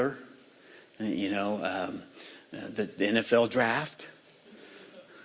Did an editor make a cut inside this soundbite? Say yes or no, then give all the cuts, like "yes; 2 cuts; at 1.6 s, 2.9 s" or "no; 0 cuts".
no; 0 cuts